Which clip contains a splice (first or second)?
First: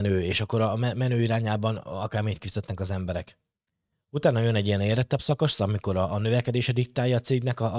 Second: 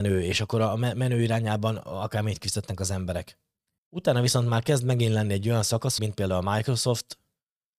second